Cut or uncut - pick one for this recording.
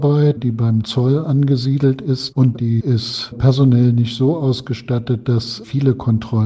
uncut